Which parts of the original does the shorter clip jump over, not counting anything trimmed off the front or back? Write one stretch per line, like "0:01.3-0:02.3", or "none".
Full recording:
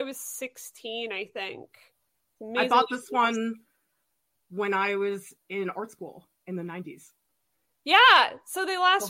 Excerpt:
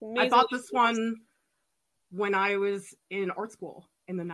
none